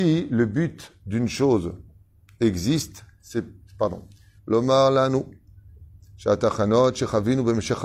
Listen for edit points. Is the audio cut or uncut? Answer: cut